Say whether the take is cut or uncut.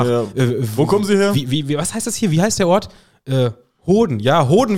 uncut